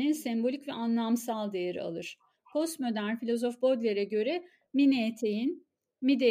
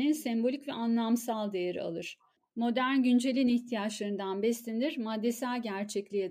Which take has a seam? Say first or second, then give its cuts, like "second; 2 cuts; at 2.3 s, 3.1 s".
second; 1 cut; at 2.4 s